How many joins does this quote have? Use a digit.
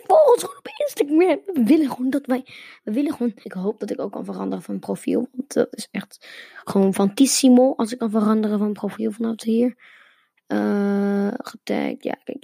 1